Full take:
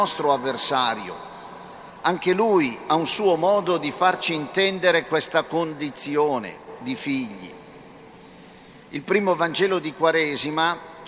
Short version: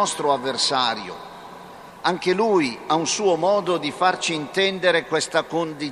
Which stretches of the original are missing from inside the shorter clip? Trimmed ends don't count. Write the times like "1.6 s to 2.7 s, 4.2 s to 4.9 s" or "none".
none